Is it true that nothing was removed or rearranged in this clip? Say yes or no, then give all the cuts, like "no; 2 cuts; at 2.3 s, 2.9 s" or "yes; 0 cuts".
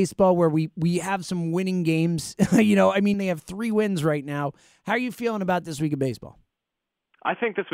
no; 1 cut; at 3.1 s